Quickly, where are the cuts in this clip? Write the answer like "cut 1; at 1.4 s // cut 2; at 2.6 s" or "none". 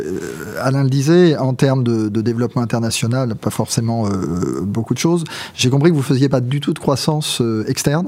none